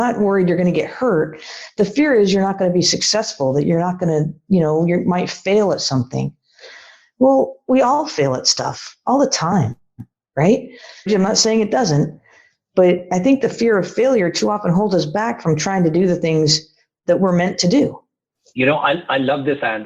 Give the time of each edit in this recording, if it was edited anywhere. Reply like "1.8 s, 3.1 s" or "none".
11.1 s